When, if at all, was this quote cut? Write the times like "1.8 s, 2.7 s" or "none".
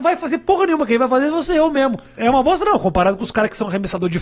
2.2 s